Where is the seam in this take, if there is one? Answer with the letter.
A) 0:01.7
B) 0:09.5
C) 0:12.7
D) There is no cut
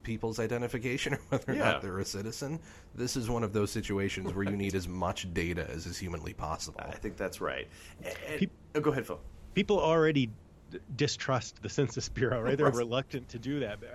C